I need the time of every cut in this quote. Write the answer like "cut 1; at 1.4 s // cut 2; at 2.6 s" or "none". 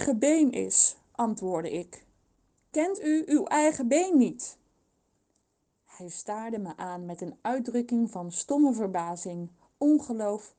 none